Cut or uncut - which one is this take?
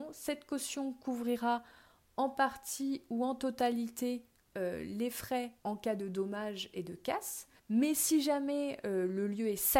cut